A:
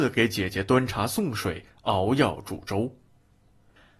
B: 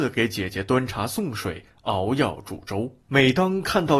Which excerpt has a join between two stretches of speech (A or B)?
B